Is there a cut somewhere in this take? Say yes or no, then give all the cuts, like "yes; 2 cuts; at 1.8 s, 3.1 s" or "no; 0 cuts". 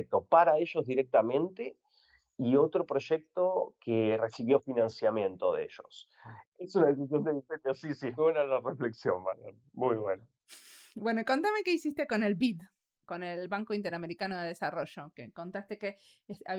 yes; 2 cuts; at 6.4 s, 8.2 s